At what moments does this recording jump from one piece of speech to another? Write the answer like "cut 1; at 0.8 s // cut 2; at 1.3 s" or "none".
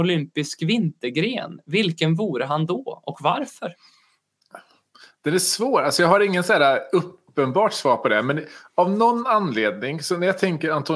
none